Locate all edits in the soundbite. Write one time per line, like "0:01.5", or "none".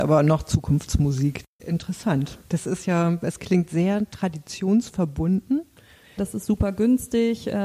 0:01.6
0:06.2